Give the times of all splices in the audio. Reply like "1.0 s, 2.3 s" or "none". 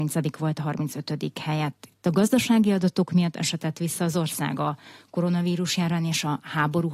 none